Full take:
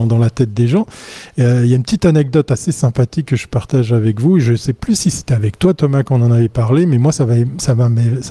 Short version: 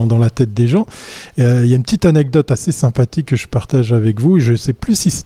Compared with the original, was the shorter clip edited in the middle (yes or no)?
no